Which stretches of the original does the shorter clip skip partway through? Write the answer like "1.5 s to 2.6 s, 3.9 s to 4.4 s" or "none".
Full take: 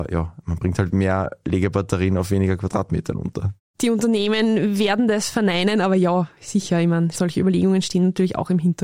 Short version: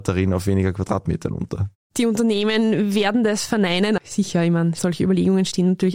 5.8 s to 6.3 s